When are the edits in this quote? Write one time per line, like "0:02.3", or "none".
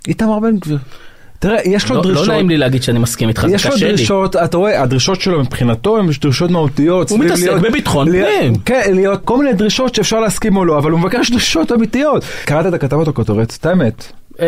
0:09.2
0:12.4